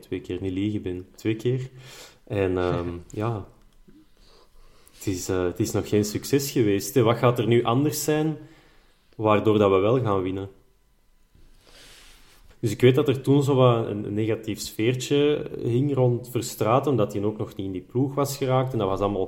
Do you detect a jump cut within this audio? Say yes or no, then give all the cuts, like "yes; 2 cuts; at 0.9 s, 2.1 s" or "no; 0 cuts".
yes; 1 cut; at 12.5 s